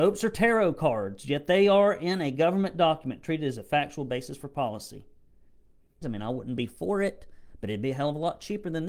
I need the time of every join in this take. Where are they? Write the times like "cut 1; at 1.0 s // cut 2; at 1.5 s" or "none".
cut 1; at 6.0 s

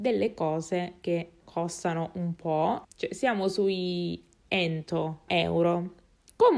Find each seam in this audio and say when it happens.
cut 1; at 1.4 s // cut 2; at 2.8 s // cut 3; at 5.3 s

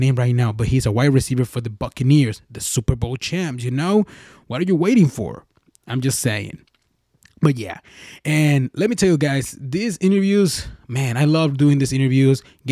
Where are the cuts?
none

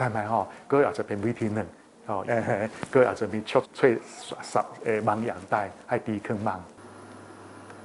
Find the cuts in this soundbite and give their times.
cut 1; at 2.2 s // cut 2; at 3.6 s

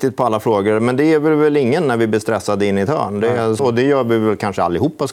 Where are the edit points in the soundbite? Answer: cut 1; at 3.6 s

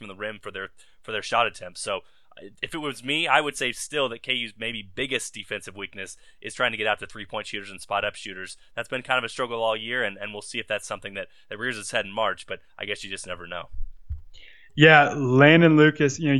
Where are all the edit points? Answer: none

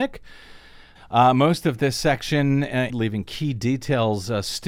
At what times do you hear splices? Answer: cut 1; at 1.0 s // cut 2; at 2.9 s

